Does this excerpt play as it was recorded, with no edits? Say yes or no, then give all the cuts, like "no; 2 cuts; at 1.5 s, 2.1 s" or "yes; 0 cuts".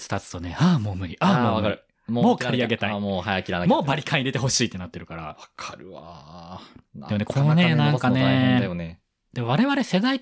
yes; 0 cuts